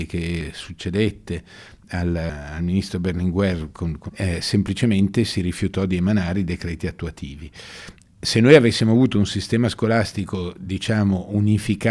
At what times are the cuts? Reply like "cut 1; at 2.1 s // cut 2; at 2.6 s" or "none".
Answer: cut 1; at 4.1 s